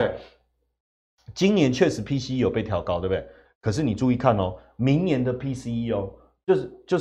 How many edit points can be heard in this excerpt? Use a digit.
1